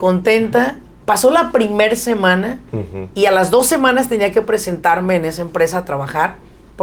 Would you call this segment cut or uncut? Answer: uncut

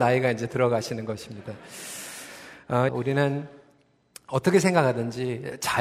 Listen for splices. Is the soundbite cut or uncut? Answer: cut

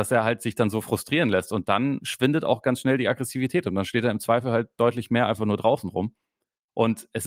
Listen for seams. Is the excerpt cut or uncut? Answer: uncut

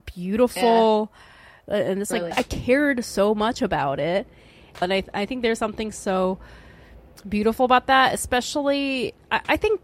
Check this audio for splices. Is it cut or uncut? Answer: cut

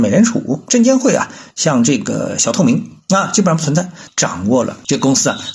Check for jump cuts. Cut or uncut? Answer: cut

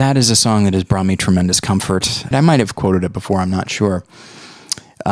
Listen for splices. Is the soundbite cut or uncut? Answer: cut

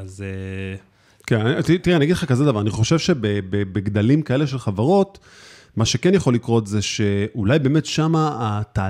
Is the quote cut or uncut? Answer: uncut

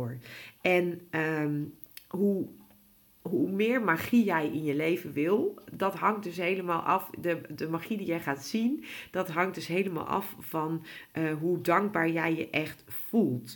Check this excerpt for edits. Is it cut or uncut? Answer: uncut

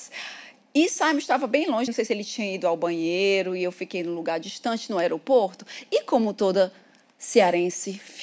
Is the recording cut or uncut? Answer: cut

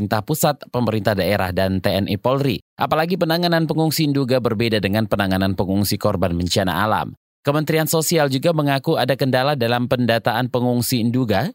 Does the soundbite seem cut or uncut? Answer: uncut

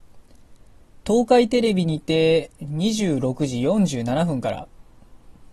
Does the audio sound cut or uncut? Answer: uncut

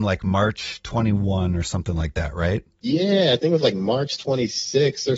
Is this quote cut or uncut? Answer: uncut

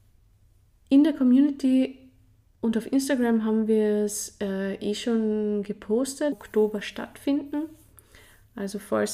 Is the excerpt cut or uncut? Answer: cut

